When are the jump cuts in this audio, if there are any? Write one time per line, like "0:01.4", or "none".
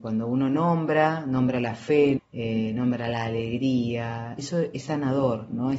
0:02.2
0:04.4

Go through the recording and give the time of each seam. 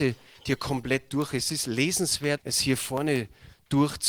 0:02.4

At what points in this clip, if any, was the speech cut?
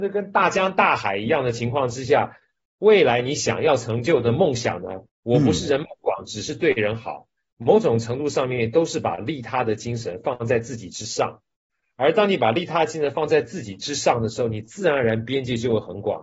0:05.1

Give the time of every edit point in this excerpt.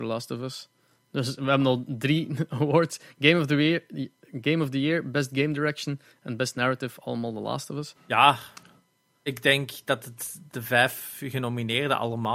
0:07.9
0:10.5

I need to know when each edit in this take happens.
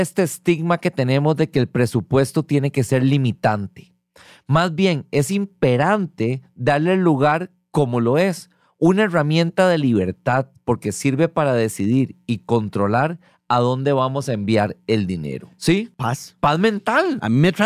0:15.6

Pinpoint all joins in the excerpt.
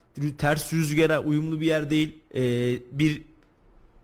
0:02.3

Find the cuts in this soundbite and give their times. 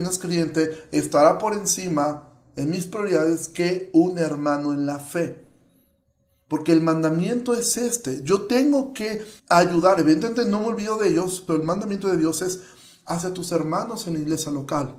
0:09.4
0:11.5

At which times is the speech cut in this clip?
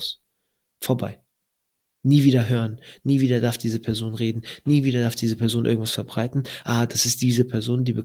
none

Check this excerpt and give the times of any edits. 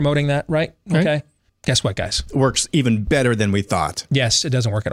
0:01.5

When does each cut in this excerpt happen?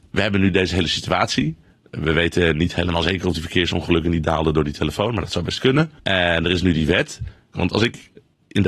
0:06.0
0:07.5

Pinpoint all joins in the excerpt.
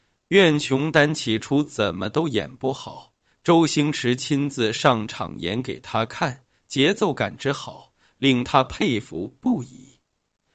none

